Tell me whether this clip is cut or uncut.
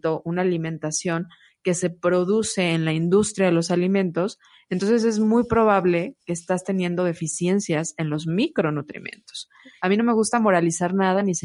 cut